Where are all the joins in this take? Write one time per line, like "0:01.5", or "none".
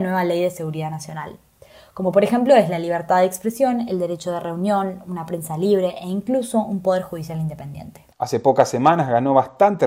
0:08.1